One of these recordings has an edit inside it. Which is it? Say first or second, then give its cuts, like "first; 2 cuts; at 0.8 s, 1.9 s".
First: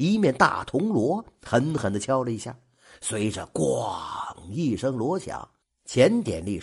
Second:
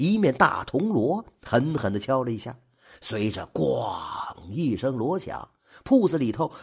first; 1 cut; at 5.6 s